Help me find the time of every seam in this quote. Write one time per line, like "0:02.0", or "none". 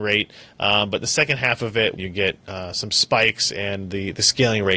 0:02.0